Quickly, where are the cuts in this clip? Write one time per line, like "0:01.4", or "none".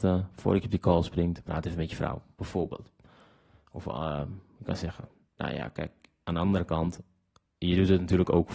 none